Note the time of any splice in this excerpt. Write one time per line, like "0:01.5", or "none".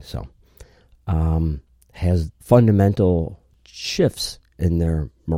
0:02.4